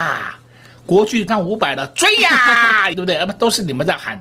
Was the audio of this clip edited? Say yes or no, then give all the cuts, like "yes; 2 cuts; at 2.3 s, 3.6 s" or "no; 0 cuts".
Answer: yes; 2 cuts; at 1.3 s, 2.9 s